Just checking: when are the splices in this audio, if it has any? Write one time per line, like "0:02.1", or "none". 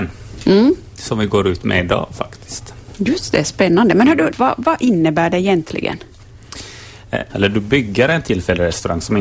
0:04.3
0:07.3